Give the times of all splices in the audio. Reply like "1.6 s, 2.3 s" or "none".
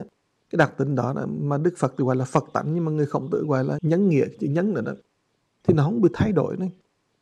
3.8 s